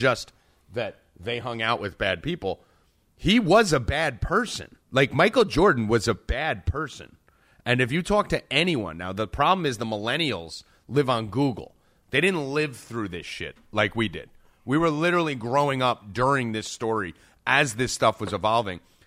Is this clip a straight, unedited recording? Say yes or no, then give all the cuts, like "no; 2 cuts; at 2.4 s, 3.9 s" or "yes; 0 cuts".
no; 1 cut; at 4.8 s